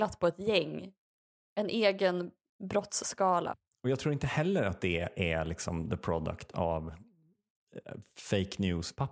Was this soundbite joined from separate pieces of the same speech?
no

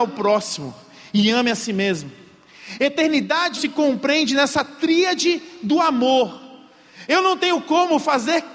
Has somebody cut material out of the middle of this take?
yes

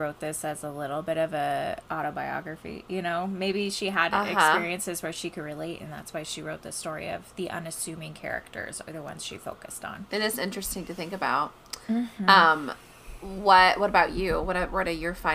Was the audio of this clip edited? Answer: no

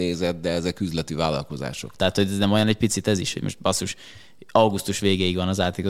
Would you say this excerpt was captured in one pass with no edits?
no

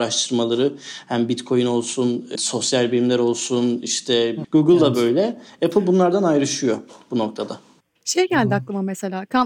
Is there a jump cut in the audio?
yes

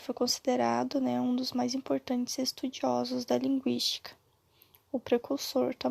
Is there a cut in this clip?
no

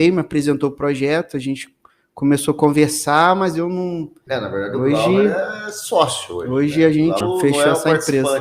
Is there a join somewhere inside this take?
yes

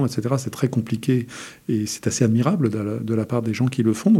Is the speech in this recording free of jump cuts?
yes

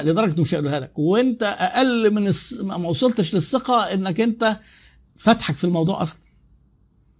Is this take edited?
no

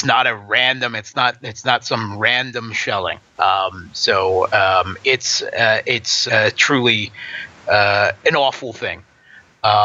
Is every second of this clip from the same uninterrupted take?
no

